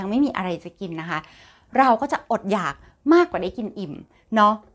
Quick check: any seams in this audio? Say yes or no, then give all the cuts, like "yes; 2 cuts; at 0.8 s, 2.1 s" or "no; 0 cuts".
no; 0 cuts